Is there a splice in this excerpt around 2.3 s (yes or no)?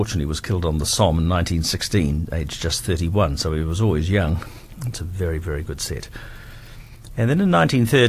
no